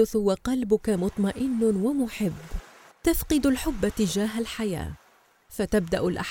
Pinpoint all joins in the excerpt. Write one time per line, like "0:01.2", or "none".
0:02.9